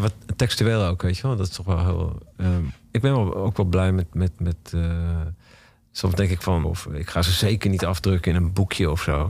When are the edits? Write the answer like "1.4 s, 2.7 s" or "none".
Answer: 6.6 s